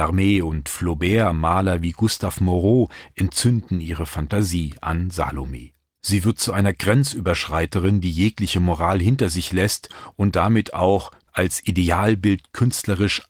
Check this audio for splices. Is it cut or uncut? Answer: cut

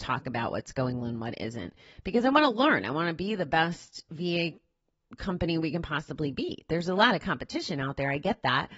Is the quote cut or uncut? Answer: cut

